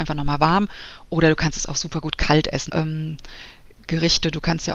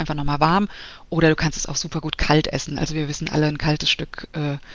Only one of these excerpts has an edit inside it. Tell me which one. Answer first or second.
first